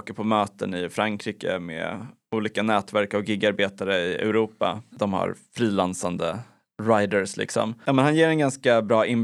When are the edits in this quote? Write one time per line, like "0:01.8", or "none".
0:04.9